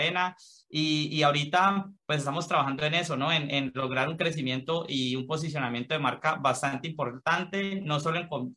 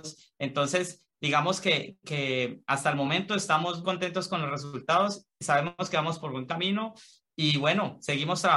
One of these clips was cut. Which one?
second; 1 cut; at 3.8 s

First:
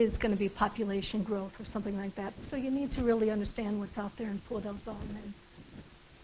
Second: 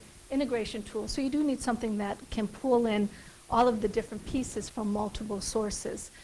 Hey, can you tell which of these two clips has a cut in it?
first; 1 cut; at 2.4 s

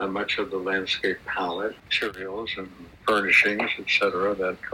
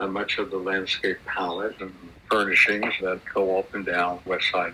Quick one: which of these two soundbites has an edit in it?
second; 2 cuts; at 1.8 s, 3.0 s

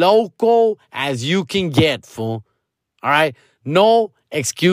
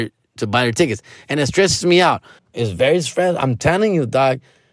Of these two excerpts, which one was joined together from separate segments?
second; 1 cut; at 2.4 s

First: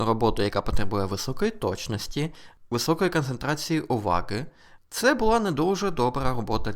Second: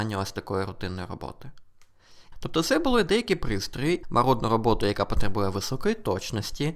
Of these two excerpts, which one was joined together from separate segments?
second; 2 cuts; at 2.3 s, 4.0 s

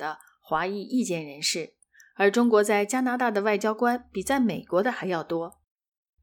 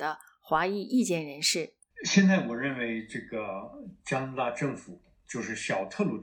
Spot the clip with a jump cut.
second; 1 cut; at 1.9 s

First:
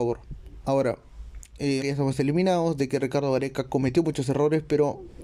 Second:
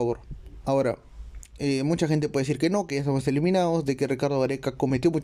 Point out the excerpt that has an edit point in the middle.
first; 1 cut; at 1.8 s

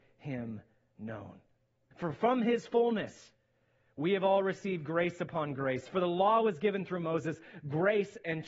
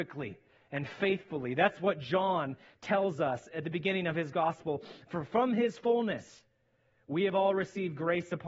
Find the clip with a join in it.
first; 1 cut; at 1.9 s

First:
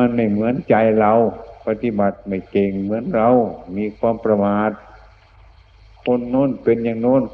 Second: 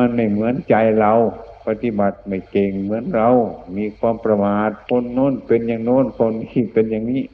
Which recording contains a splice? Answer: second; 1 cut; at 4.8 s

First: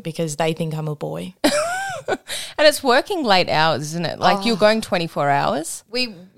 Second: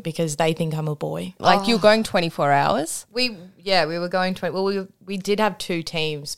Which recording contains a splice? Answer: second; 1 cut; at 1.4 s

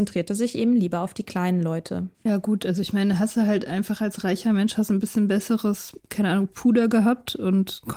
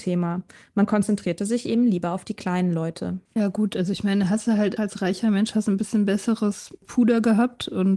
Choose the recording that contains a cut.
second; 2 cuts; at 4.8 s, 6.8 s

